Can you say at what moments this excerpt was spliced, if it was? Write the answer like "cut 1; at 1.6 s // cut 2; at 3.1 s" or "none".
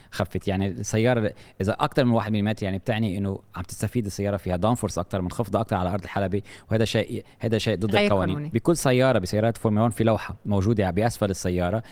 cut 1; at 8.5 s